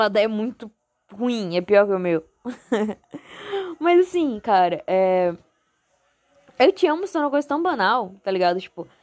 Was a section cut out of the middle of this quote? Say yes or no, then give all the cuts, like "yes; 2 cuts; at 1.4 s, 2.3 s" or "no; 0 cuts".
no; 0 cuts